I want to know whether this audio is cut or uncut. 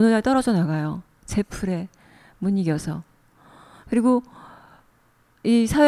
uncut